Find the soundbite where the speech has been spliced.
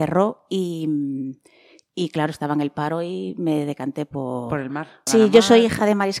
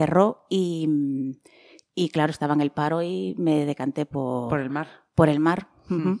first; 1 cut; at 5.1 s

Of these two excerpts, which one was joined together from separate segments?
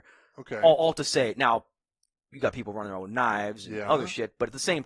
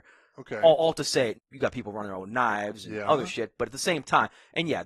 second; 1 cut; at 1.3 s

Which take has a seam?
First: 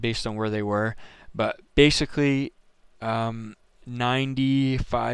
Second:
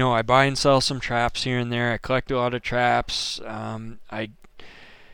first; 1 cut; at 1.7 s

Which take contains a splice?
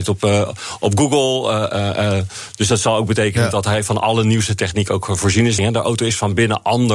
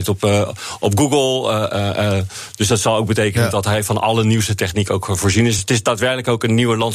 first; 1 cut; at 5.6 s

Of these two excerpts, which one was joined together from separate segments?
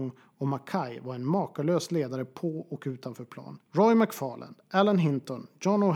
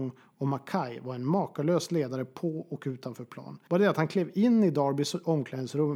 first; 1 cut; at 3.6 s

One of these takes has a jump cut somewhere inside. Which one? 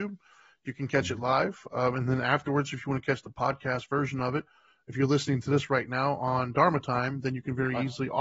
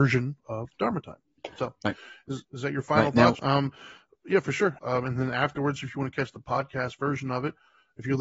second; 2 cuts; at 3.4 s, 4.8 s

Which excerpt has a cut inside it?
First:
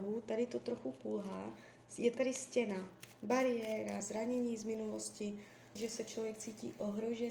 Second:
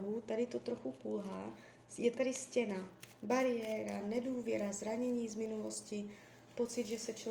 first; 2 cuts; at 4.0 s, 5.8 s

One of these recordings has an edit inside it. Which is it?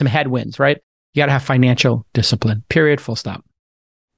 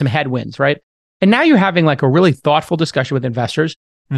first; 1 cut; at 1.0 s

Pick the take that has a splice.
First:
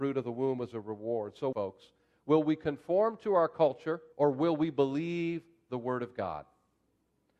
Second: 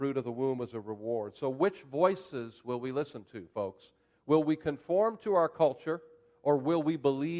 first; 2 cuts; at 1.5 s, 4.1 s

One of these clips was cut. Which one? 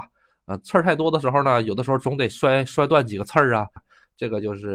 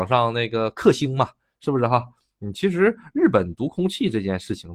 first; 1 cut; at 3.8 s

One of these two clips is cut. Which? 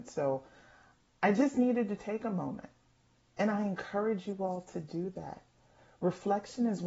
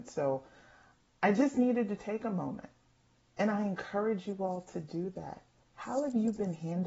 second; 1 cut; at 5.6 s

